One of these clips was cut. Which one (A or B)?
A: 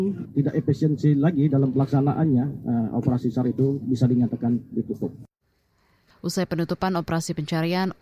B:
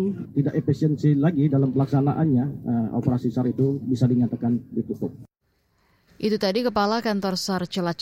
A